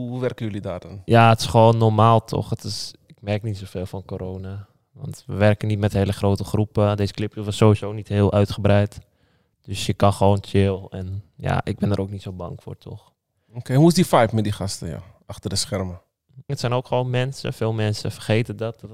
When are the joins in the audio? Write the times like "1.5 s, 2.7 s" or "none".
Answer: 16.5 s